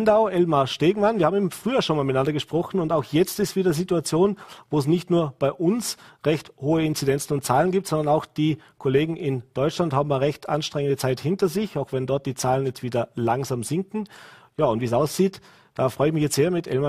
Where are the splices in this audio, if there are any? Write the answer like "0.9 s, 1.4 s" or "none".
none